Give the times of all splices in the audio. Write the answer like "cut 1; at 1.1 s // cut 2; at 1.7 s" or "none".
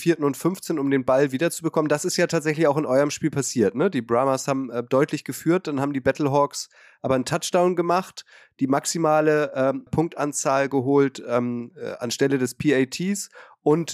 cut 1; at 9.9 s